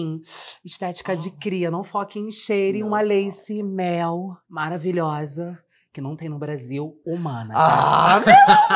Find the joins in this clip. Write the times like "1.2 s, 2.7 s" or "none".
4.4 s

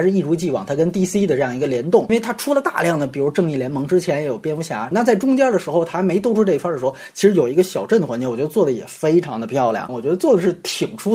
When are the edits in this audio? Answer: 4.9 s, 9.9 s

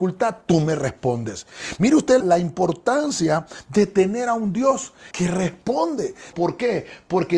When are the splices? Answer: 2.2 s, 5.1 s, 6.3 s

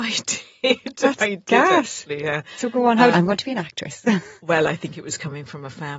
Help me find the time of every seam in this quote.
3.1 s

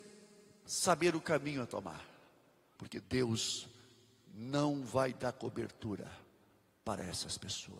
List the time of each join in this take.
2.8 s

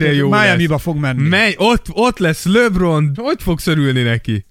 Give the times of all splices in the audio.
3.1 s

